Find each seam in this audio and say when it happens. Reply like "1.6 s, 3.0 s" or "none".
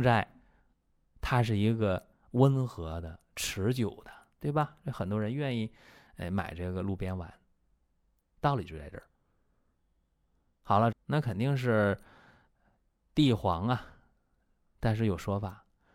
10.9 s